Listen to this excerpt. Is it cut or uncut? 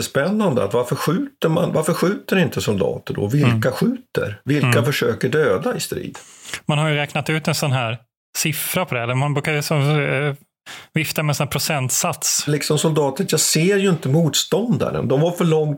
cut